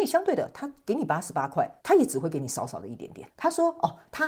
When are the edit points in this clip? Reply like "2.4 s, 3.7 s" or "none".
1.8 s, 3.3 s

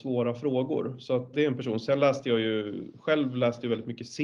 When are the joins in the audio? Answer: 1.3 s

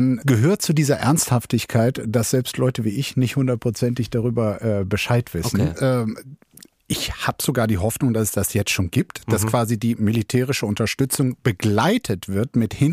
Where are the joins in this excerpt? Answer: 5.8 s

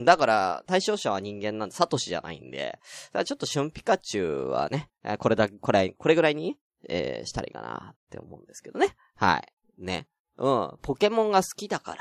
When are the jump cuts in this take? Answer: 9.6 s

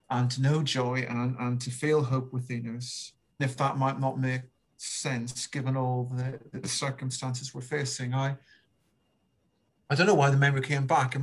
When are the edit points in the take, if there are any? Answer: 3.4 s

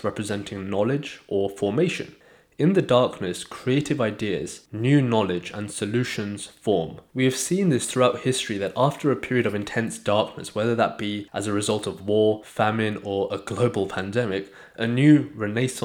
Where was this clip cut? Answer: 7.1 s

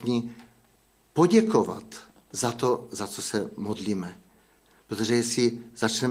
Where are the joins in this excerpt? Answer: none

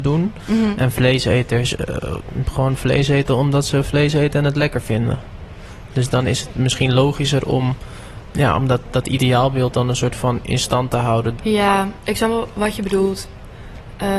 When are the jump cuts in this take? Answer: 8.3 s, 11.4 s

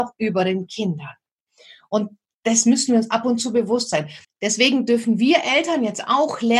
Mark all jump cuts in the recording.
4.2 s

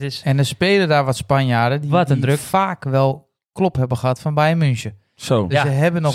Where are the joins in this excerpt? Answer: none

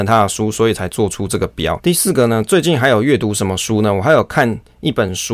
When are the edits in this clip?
1.8 s

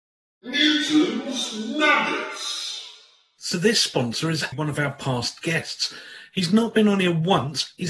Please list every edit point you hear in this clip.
4.5 s

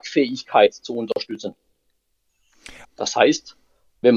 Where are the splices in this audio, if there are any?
2.8 s

